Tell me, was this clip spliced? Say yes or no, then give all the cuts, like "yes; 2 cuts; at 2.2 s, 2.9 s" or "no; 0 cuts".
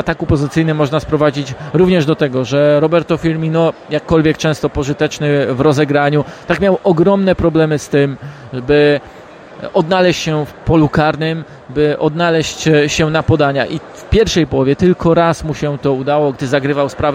no; 0 cuts